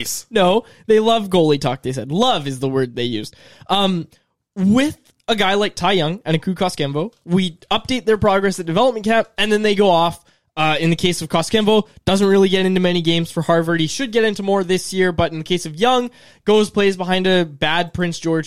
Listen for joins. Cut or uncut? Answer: uncut